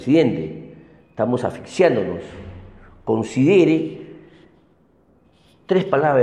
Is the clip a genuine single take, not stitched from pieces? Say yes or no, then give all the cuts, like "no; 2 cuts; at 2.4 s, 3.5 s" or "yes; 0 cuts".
yes; 0 cuts